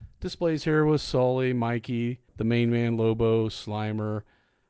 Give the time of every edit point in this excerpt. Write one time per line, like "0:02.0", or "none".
0:02.3